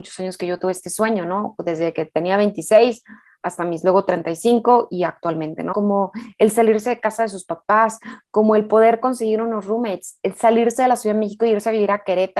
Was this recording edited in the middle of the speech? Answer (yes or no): yes